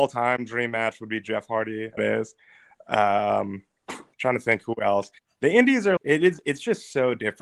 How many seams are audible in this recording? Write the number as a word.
two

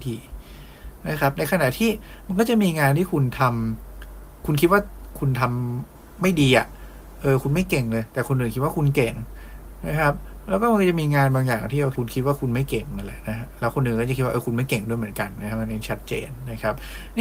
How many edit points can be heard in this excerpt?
one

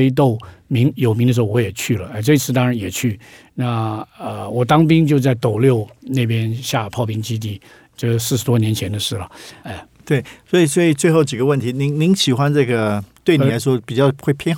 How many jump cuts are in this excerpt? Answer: two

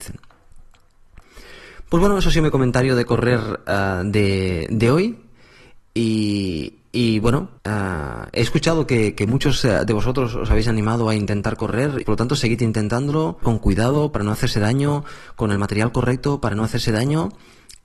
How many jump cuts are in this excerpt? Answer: three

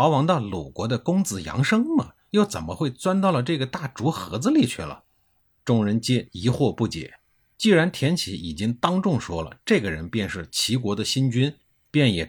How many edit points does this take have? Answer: one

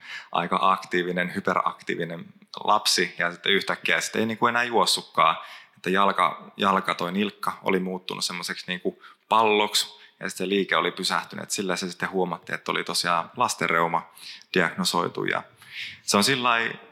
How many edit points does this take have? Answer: zero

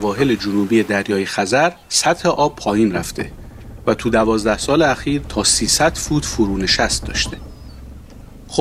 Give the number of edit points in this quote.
one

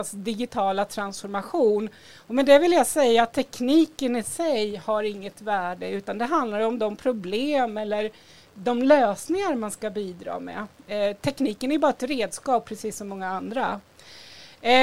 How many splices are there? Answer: zero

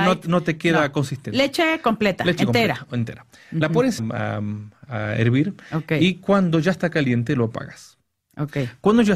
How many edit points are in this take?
one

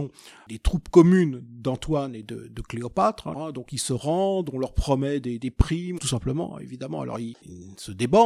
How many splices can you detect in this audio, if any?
two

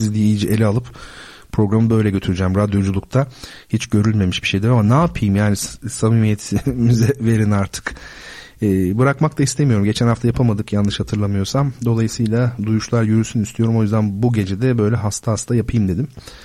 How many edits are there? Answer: zero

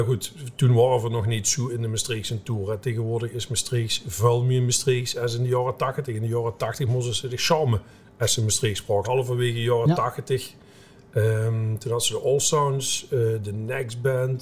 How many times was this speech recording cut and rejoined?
one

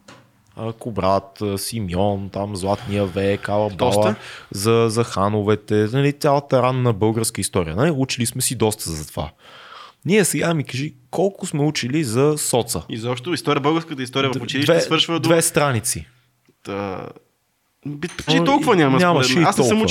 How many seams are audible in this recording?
one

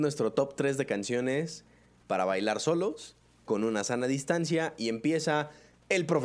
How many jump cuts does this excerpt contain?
zero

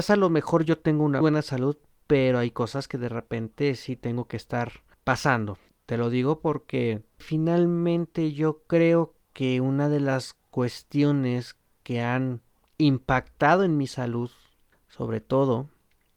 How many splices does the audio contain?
two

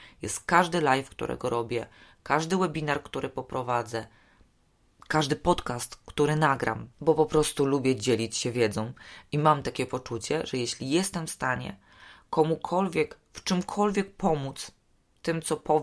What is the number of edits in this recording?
one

